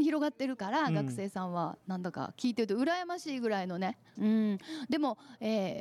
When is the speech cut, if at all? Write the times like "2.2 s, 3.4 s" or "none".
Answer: 4.2 s